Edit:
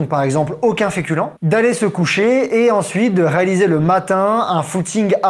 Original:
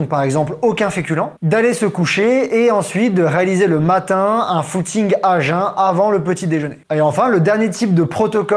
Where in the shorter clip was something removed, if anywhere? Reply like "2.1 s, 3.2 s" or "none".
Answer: none